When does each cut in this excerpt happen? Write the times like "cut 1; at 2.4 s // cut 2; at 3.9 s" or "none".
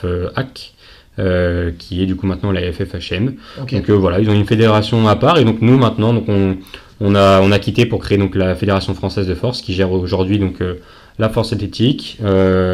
none